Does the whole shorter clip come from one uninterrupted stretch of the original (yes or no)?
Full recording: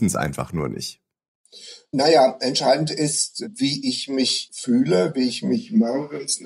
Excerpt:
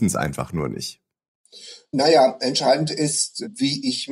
yes